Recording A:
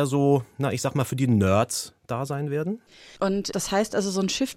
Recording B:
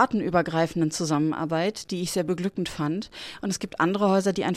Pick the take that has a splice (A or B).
A